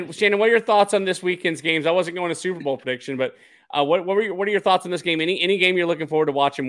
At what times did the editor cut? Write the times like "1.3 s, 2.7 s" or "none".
none